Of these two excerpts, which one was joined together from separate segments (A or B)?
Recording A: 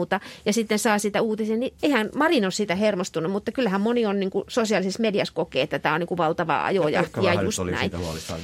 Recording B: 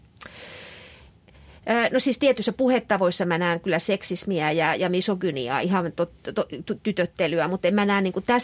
A